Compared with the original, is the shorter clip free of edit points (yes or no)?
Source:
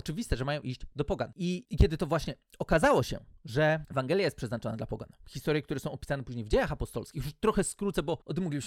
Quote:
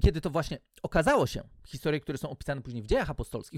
no